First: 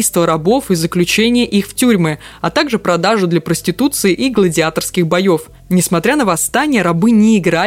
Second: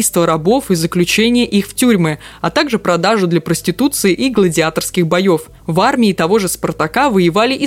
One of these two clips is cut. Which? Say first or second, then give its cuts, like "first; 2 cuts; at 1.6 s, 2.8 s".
second; 1 cut; at 5.6 s